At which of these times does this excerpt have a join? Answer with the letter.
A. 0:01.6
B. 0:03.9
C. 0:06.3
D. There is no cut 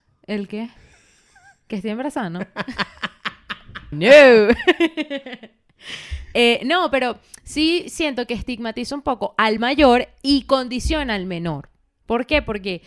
B